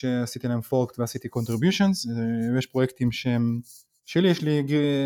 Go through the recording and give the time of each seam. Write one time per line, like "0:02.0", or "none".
none